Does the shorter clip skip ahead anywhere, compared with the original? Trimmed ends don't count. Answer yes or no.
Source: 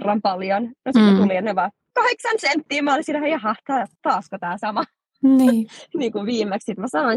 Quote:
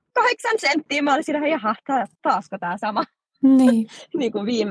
no